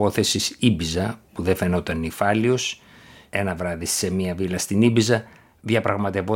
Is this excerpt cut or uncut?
cut